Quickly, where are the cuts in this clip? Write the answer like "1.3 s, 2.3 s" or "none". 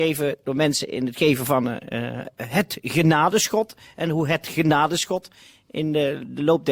none